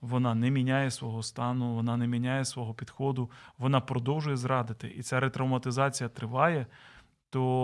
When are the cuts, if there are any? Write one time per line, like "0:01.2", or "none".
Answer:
none